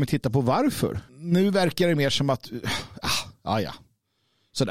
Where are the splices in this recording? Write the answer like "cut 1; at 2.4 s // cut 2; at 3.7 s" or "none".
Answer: cut 1; at 1.1 s

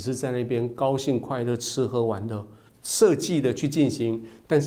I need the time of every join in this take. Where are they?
cut 1; at 2.7 s

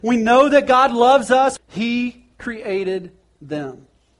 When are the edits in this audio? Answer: cut 1; at 1.6 s

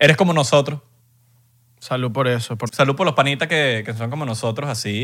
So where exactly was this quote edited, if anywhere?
cut 1; at 2.7 s

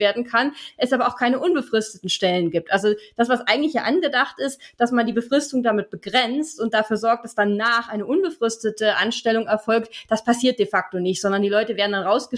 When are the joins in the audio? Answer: none

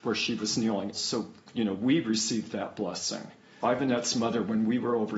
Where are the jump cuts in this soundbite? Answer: cut 1; at 0.9 s // cut 2; at 3.6 s

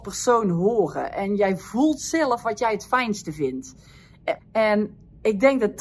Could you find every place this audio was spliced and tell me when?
cut 1; at 4.4 s

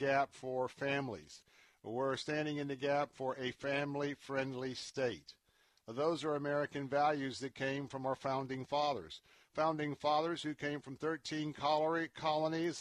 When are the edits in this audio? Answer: none

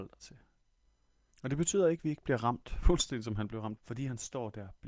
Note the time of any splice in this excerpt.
cut 1; at 1.3 s // cut 2; at 3.8 s

